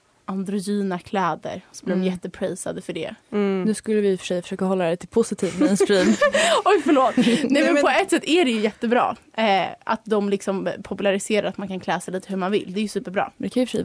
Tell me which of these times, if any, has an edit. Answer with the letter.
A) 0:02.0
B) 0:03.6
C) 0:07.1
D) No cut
D